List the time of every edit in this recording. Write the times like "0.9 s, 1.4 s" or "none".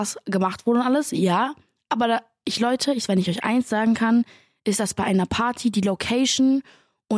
none